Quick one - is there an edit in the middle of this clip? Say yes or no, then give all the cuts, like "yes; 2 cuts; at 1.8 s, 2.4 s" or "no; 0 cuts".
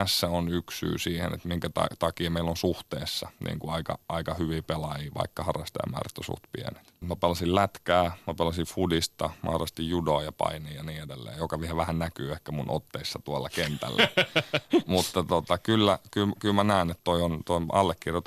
yes; 1 cut; at 7.0 s